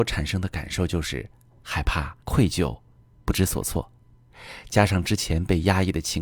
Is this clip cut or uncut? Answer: cut